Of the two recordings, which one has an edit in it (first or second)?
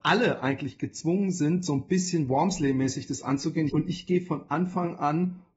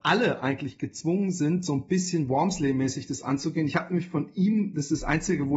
first